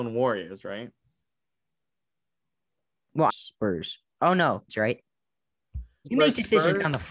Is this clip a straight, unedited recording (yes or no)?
no